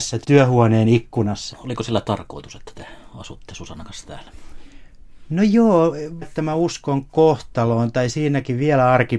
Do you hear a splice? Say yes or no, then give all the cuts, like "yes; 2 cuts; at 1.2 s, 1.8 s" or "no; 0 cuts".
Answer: yes; 2 cuts; at 1.5 s, 6.2 s